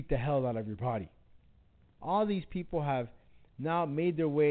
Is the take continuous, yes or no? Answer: no